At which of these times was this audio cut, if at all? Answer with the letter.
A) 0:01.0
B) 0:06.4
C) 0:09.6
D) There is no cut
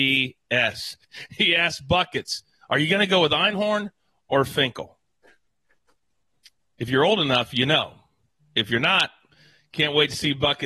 A